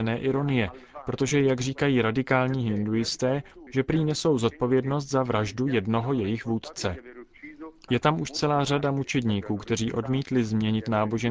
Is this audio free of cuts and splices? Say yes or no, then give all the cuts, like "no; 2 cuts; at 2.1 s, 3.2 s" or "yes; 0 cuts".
no; 2 cuts; at 3.7 s, 7.9 s